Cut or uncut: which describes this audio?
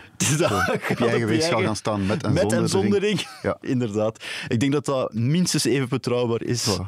uncut